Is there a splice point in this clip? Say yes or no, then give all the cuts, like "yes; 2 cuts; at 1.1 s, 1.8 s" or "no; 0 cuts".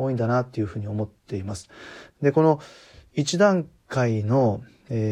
yes; 1 cut; at 2.1 s